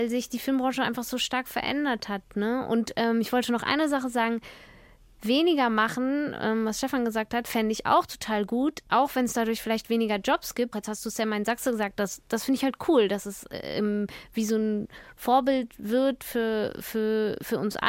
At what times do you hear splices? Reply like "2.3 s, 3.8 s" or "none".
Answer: 10.7 s